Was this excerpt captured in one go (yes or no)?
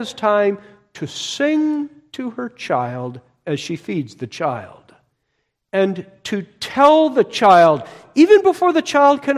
yes